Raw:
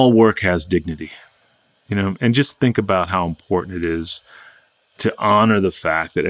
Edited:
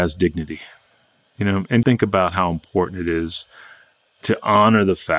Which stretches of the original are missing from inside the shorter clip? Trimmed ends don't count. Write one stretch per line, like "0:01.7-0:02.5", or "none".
0:02.3-0:02.6